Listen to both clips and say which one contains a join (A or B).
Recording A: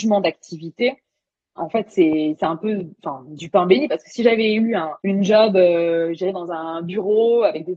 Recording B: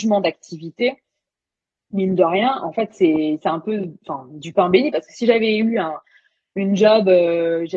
A